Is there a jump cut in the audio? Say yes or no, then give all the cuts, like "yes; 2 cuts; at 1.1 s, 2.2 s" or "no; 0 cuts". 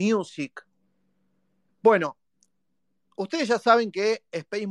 yes; 1 cut; at 1.7 s